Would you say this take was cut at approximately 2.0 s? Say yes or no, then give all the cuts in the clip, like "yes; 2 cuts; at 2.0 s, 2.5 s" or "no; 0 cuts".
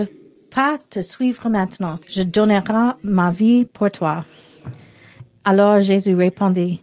yes; 1 cut; at 2.0 s